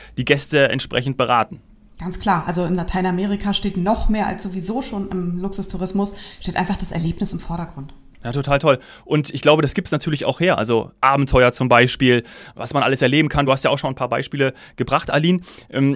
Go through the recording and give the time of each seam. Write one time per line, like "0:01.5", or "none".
none

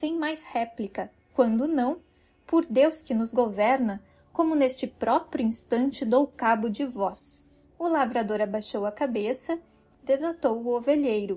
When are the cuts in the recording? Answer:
0:07.7
0:09.9

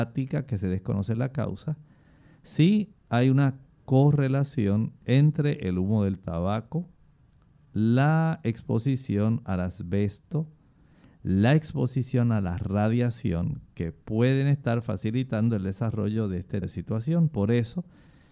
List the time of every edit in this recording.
0:16.6

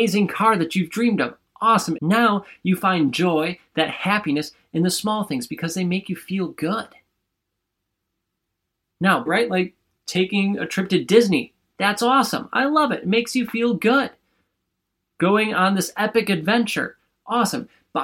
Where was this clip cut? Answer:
0:02.0
0:09.3

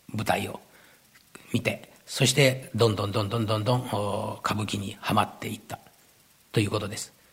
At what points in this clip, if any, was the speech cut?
none

